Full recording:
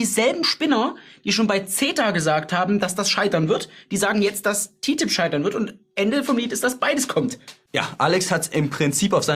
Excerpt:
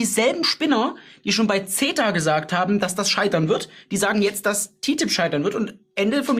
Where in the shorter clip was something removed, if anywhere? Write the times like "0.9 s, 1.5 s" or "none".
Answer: none